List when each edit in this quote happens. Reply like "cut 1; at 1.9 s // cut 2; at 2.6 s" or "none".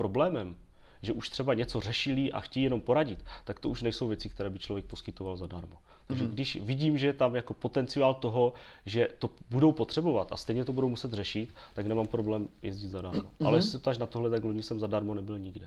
none